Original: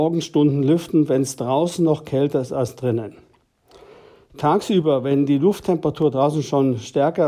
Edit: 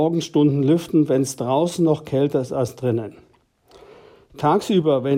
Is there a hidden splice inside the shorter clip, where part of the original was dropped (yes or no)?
no